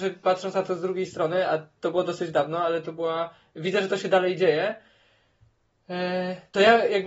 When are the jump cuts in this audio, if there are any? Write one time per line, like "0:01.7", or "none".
none